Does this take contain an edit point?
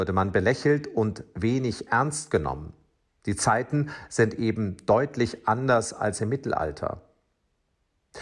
no; 0 cuts

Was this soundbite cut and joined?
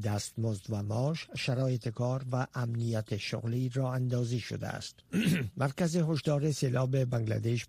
yes; 1 cut; at 5.0 s

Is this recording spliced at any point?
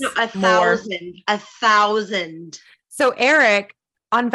no; 0 cuts

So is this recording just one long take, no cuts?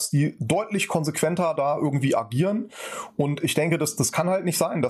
yes; 0 cuts

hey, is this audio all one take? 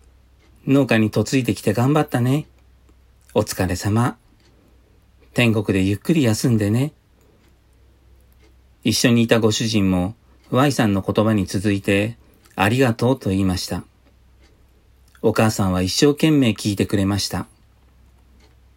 yes; 0 cuts

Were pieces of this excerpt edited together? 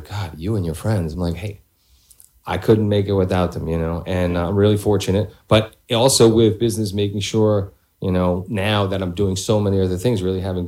no; 0 cuts

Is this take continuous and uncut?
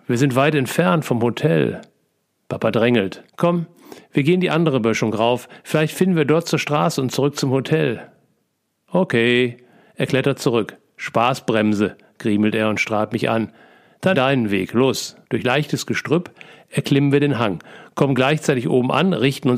no; 3 cuts; at 3.3 s, 14.1 s, 15.2 s

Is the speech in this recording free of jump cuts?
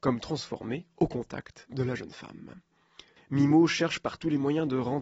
no; 1 cut; at 3.2 s

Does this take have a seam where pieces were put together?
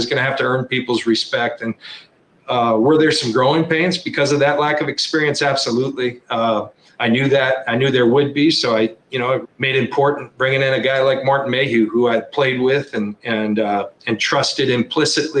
yes; 1 cut; at 9.4 s

